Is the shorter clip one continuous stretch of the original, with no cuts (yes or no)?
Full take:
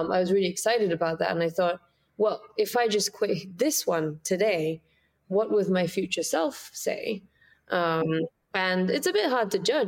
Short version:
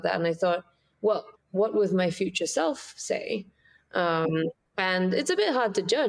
no